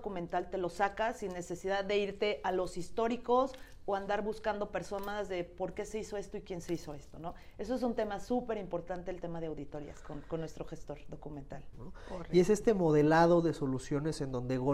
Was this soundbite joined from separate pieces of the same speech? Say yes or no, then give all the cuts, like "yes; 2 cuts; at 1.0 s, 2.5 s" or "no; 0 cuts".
yes; 1 cut; at 11.7 s